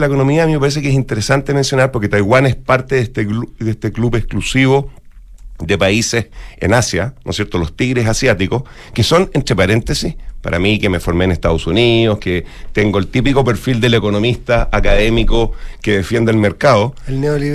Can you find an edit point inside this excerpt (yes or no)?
no